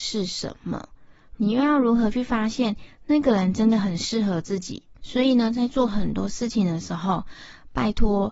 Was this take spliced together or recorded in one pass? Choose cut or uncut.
cut